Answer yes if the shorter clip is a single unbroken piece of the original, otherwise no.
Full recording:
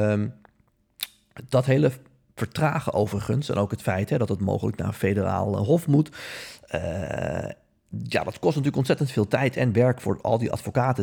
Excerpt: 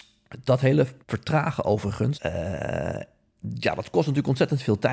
no